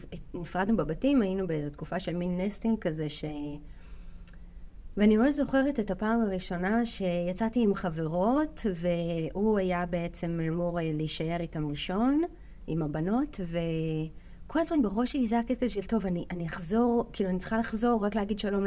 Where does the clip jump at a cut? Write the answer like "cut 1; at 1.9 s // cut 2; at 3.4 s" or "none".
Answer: none